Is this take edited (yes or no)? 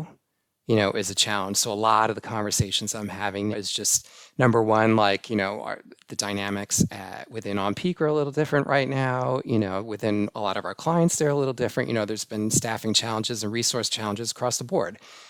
yes